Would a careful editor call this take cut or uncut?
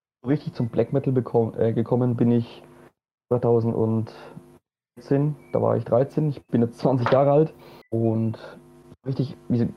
cut